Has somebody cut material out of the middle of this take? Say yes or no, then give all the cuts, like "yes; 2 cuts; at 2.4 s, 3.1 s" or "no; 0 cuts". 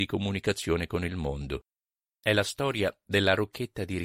no; 0 cuts